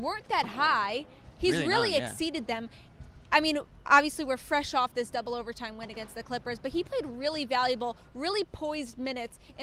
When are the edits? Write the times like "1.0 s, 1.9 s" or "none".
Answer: none